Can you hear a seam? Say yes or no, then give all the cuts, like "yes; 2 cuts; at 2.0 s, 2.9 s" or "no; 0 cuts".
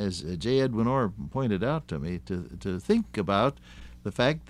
no; 0 cuts